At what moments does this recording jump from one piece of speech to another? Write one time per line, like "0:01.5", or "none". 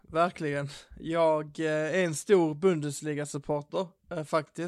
none